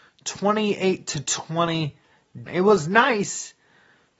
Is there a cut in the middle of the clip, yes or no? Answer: yes